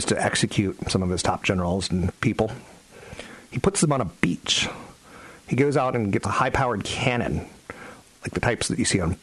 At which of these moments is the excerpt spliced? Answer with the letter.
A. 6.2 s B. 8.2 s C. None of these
A